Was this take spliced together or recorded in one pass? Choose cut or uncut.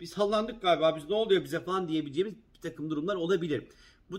uncut